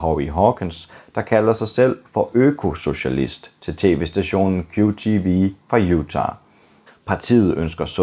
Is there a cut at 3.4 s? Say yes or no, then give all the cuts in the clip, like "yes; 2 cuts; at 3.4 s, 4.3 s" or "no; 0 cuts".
no; 1 cut; at 6.9 s